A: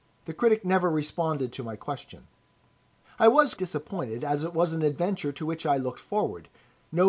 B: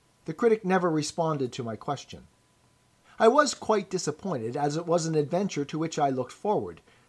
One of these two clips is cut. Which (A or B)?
A